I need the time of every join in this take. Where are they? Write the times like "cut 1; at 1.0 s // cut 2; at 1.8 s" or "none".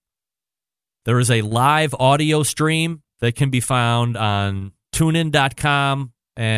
cut 1; at 1.0 s // cut 2; at 3.1 s

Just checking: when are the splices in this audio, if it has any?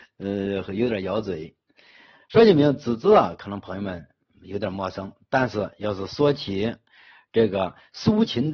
none

